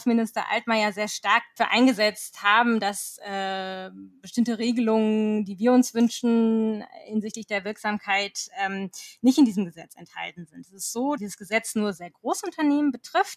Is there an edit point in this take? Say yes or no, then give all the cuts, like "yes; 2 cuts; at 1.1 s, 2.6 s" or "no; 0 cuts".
yes; 1 cut; at 11.2 s